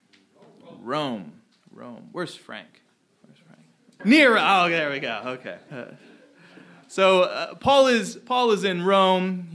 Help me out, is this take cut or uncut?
cut